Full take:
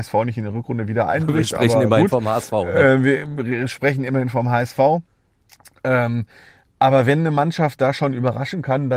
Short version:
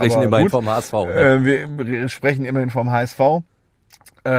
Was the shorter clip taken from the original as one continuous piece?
yes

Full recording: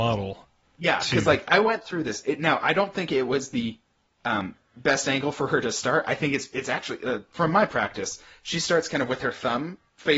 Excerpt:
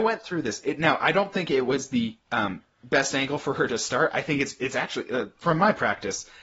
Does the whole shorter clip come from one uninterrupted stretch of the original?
no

